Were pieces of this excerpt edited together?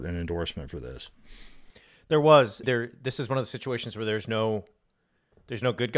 yes; 1 cut; at 2.6 s

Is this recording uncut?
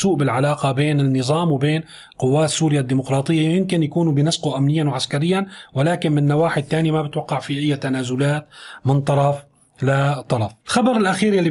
no; 1 cut; at 10.6 s

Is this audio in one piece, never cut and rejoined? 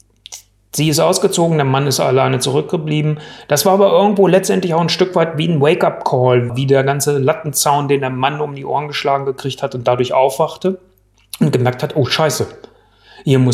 no; 1 cut; at 6.5 s

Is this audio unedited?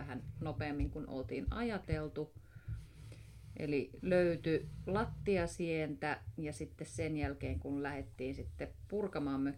no; 1 cut; at 6.4 s

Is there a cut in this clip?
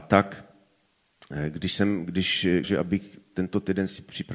yes; 1 cut; at 2.6 s

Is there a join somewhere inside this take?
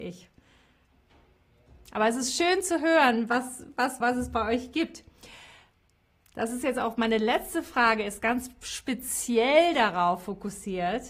yes; 1 cut; at 4.0 s

